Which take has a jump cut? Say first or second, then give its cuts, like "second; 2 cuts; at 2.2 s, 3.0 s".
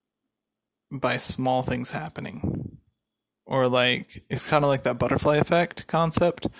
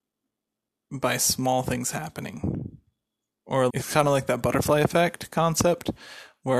second; 1 cut; at 3.7 s